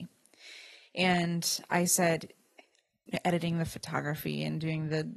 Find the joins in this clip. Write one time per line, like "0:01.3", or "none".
0:03.1